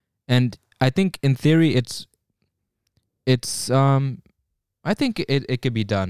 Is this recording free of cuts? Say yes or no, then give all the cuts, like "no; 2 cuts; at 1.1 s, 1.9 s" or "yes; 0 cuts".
yes; 0 cuts